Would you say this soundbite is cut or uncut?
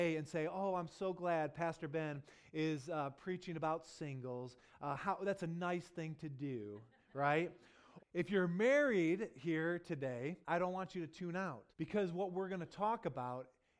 cut